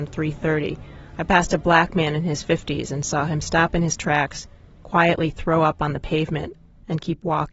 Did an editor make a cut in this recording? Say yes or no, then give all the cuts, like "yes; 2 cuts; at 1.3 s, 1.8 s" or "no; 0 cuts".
no; 0 cuts